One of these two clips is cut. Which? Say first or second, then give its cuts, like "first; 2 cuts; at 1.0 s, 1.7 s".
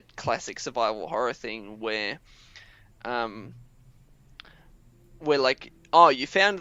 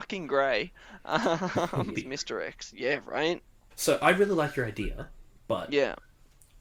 second; 2 cuts; at 1.9 s, 3.7 s